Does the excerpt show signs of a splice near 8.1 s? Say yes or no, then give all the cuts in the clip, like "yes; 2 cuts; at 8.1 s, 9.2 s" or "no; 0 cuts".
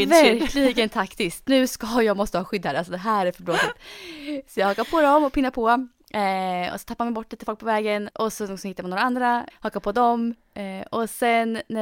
yes; 2 cuts; at 8.1 s, 9.5 s